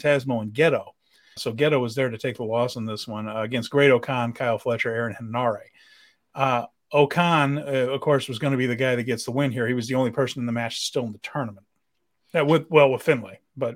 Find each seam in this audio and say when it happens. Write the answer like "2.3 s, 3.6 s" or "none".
1.4 s

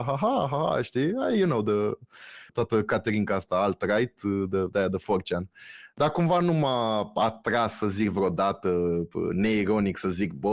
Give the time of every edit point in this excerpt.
none

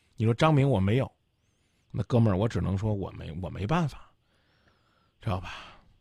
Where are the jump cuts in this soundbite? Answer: none

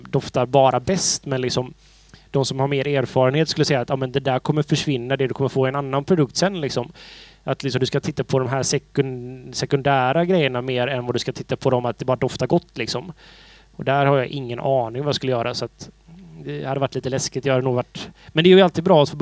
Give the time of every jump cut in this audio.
none

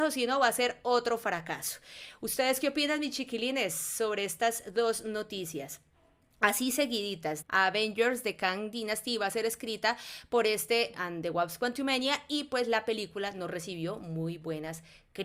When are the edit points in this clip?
7.4 s, 10.9 s

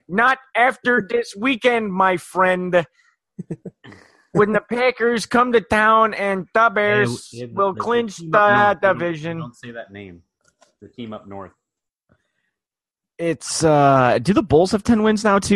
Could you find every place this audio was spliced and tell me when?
none

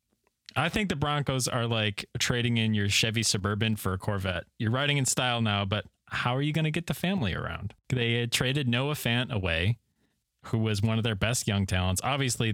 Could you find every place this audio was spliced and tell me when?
none

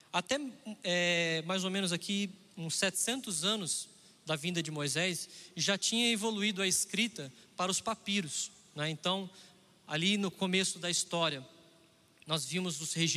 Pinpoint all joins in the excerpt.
none

